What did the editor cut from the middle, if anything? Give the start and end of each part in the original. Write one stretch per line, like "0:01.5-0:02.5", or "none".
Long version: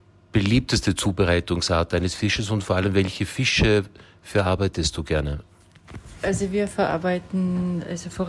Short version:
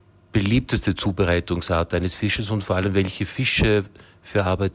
none